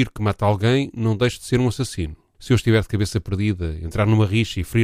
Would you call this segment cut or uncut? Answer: cut